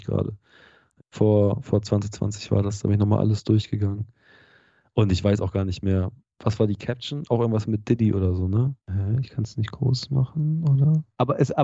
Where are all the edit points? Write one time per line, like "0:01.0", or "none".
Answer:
none